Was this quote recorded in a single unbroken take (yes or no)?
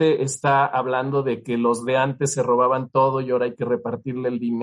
yes